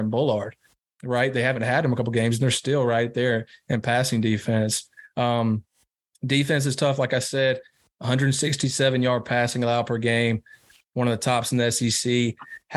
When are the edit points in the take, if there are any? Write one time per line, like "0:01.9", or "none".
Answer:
none